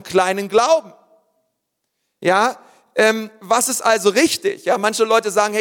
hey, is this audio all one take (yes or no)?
yes